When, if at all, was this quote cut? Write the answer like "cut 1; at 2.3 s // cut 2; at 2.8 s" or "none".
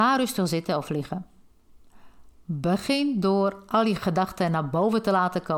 none

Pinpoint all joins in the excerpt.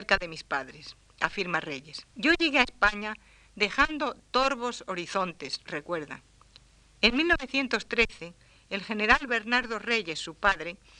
cut 1; at 2.1 s

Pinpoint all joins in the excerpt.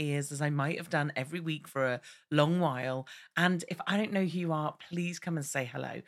none

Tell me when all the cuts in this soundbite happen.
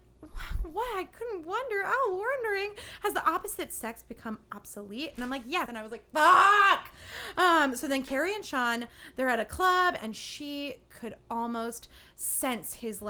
cut 1; at 5.7 s // cut 2; at 10.0 s

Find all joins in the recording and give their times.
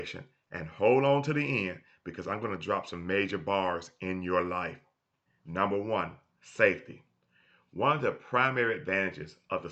cut 1; at 5.3 s

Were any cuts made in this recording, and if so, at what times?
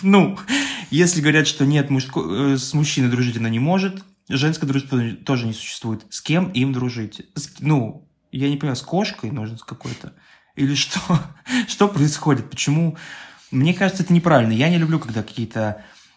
none

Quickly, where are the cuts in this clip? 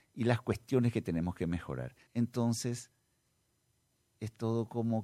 cut 1; at 2.1 s

